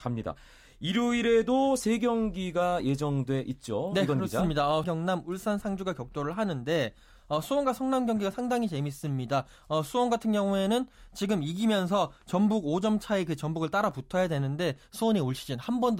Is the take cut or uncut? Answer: cut